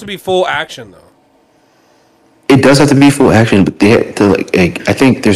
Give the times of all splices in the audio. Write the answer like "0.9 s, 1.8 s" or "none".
none